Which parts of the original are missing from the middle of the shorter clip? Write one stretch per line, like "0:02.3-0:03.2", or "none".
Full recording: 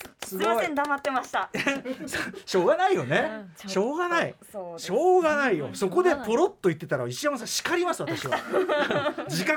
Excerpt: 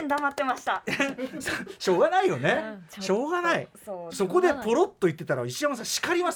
0:04.8-0:05.7